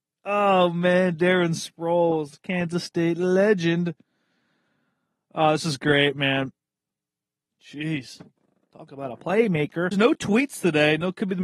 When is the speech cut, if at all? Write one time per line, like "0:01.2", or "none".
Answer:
0:07.5
0:09.9

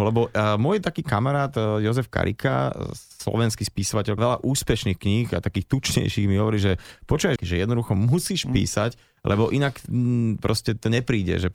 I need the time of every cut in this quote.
0:04.2
0:07.4

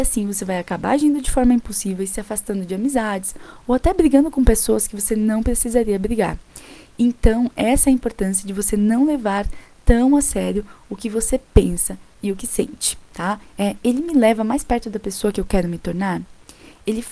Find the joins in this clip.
0:13.5

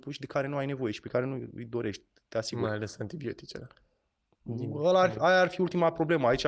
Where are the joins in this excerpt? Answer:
none

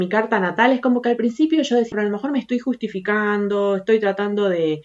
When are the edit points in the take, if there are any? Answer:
0:01.9

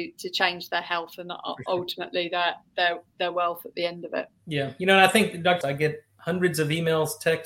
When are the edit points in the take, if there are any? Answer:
0:05.6

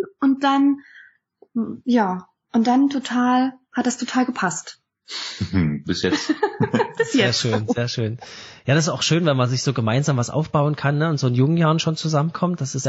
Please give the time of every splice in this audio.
none

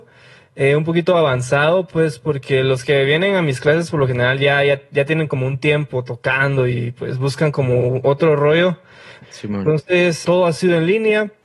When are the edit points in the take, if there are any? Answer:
0:09.2
0:10.2

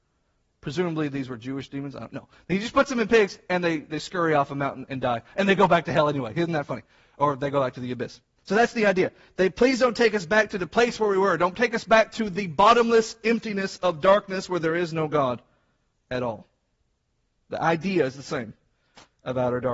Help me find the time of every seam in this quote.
none

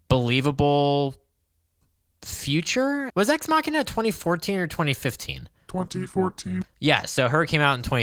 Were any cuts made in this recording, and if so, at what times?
0:03.1
0:06.6

